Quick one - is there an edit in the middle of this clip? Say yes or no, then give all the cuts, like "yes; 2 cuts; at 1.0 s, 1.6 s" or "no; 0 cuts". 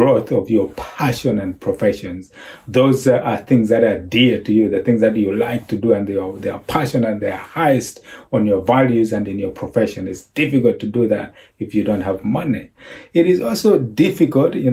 no; 0 cuts